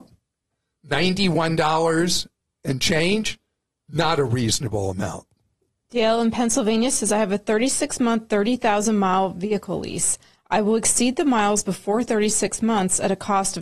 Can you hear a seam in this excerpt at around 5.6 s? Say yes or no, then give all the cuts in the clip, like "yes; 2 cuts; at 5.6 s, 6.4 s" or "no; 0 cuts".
no; 0 cuts